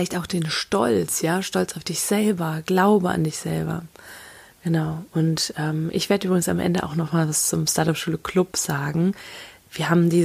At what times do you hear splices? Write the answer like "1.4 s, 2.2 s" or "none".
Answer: none